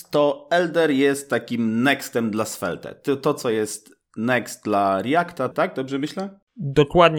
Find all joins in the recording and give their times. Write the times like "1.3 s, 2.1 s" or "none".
5.5 s